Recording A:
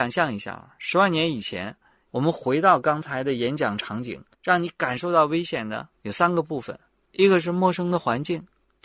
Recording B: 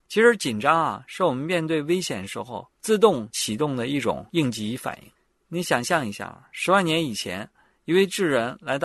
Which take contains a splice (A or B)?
A